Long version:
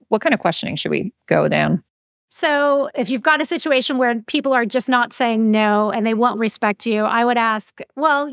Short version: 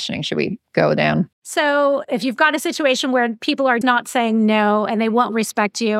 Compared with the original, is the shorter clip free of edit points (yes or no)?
no